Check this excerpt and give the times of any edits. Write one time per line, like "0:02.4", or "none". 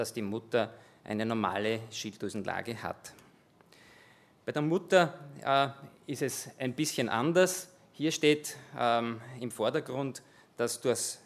none